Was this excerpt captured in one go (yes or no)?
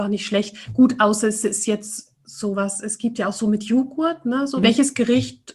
no